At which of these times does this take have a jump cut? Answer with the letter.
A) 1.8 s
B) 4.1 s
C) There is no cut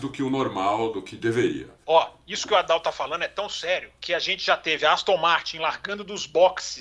A